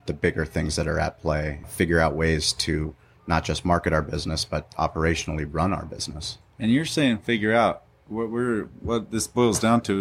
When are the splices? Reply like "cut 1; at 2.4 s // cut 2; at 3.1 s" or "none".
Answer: cut 1; at 1.6 s